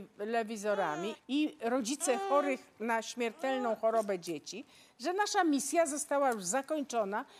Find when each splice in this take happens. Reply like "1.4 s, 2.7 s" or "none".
1.1 s